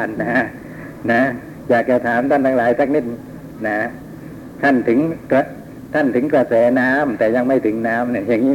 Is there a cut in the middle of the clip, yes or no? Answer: no